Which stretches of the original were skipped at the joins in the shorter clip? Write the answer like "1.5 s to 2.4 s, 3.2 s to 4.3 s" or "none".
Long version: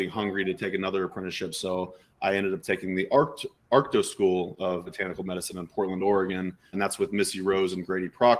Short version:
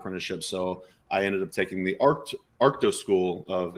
none